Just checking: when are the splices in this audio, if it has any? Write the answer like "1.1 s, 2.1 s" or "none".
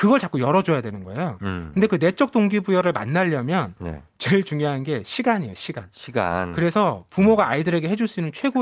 none